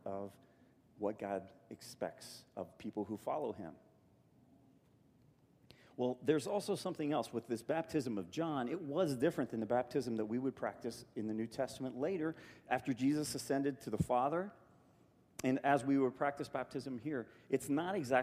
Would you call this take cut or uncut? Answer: uncut